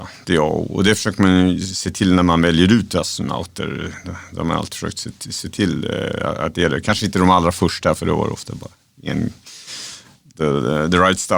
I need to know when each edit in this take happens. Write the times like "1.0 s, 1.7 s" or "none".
none